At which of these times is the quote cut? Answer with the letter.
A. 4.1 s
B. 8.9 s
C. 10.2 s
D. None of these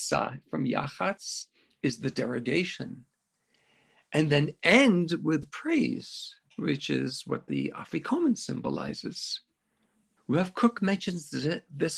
C